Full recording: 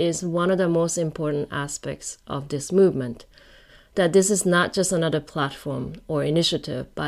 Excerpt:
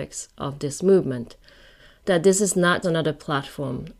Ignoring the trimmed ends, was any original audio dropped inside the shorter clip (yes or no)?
yes